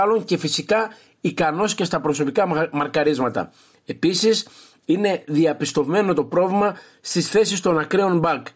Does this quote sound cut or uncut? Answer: uncut